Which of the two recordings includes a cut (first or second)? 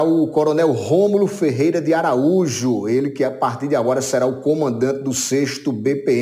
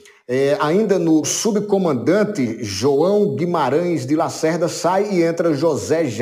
second